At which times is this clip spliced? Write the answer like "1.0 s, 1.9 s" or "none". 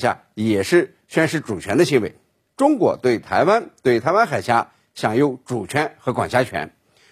2.5 s

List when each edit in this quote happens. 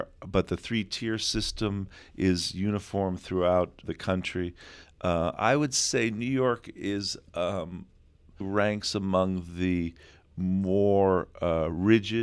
3.8 s, 8.4 s

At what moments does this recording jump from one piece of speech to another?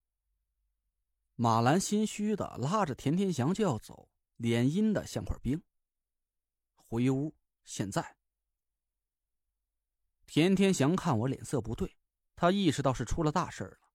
4.3 s

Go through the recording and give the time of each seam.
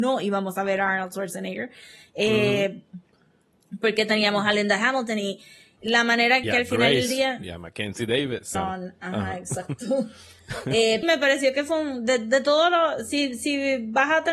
6.4 s, 8.5 s, 11.0 s

